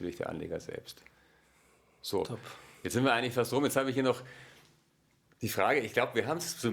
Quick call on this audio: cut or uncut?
uncut